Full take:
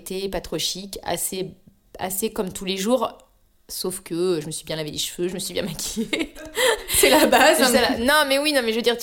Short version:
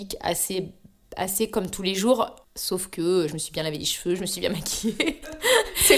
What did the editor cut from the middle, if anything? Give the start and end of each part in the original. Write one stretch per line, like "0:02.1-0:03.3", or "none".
0:03.3-0:03.6